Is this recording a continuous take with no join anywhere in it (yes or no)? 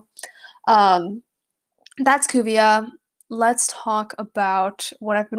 yes